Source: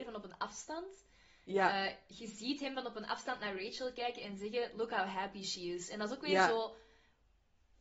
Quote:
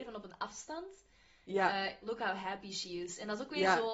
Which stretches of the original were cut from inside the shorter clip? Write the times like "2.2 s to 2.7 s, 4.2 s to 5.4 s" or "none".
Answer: 2.0 s to 4.7 s

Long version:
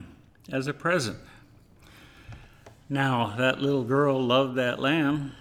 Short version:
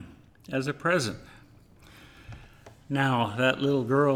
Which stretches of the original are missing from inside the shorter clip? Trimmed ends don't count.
none

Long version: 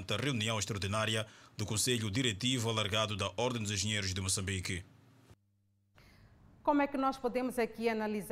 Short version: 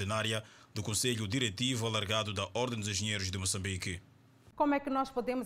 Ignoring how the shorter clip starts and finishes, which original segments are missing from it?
5.4 s to 6.6 s

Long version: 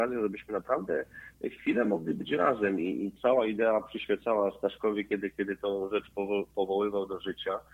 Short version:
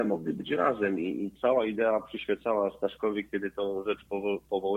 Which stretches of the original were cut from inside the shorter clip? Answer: 5.1 s to 5.3 s

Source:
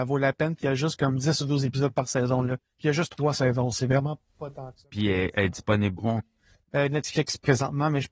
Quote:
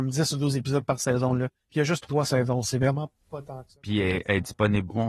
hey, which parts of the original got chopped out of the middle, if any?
none

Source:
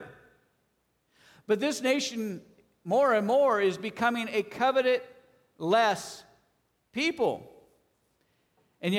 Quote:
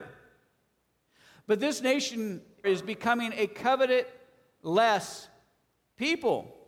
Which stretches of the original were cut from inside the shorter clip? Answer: 2.6 s to 3.6 s

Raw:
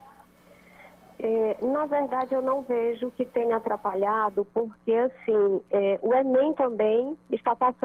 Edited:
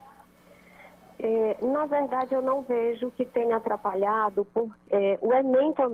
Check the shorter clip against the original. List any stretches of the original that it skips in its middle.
4.8 s to 5.6 s

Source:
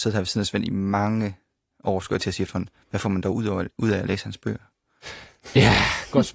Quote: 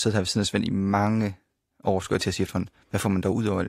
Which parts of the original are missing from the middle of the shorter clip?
none

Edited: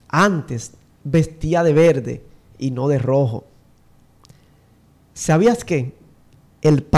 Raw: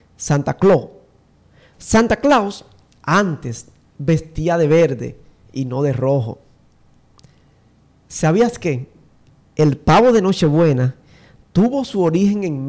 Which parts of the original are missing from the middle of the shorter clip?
none

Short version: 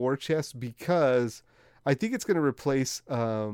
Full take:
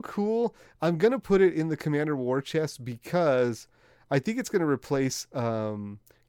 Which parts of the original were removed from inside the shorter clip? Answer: none

